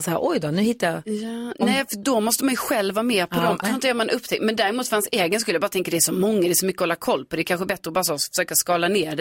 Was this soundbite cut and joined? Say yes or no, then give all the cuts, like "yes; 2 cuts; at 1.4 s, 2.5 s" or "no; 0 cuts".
yes; 1 cut; at 3.6 s